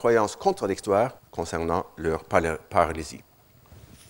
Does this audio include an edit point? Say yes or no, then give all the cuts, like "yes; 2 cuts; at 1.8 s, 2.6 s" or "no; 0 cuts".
yes; 1 cut; at 1.2 s